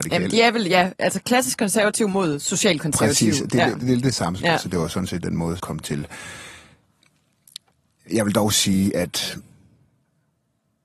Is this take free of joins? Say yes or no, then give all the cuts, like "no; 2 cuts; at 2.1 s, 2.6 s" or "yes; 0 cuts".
no; 2 cuts; at 4.4 s, 5.6 s